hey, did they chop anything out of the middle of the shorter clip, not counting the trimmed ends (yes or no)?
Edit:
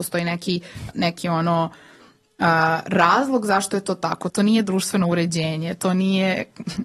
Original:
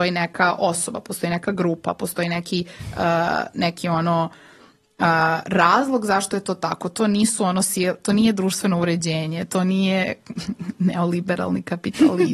yes